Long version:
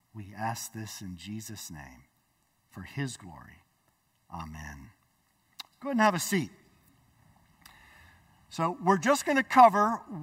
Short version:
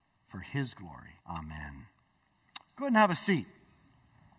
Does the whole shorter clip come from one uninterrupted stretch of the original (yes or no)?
no